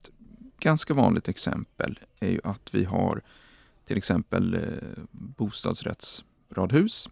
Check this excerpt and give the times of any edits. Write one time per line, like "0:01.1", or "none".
0:02.1